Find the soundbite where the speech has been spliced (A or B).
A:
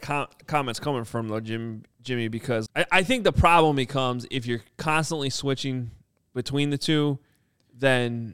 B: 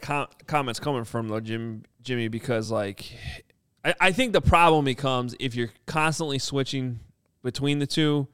A